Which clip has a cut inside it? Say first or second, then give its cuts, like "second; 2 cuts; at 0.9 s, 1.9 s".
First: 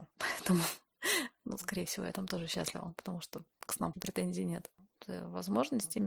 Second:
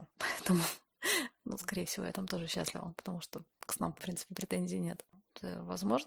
first; 1 cut; at 3.9 s